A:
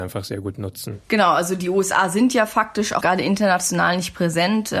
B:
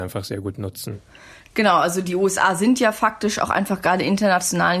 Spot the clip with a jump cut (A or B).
A